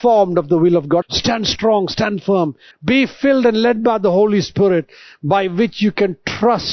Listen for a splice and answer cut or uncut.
cut